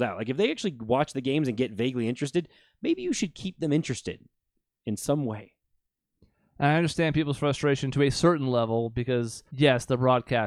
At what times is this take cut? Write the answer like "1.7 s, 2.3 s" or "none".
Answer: 9.5 s